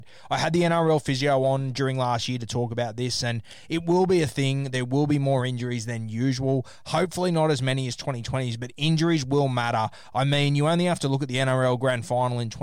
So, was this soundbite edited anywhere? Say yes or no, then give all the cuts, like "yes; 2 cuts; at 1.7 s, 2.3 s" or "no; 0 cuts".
no; 0 cuts